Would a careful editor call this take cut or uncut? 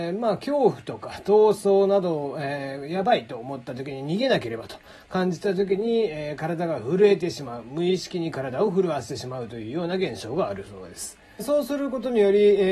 cut